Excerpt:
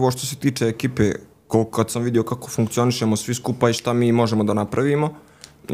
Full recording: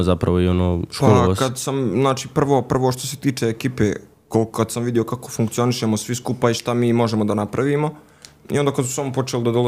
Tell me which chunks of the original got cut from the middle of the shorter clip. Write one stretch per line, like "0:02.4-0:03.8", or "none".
none